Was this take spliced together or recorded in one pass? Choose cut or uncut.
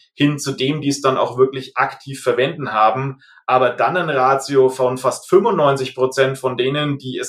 uncut